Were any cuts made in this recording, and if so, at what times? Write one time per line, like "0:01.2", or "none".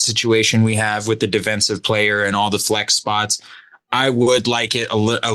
none